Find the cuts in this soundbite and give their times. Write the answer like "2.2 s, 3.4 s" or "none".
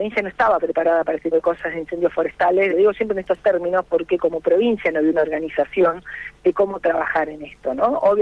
1.3 s, 2.7 s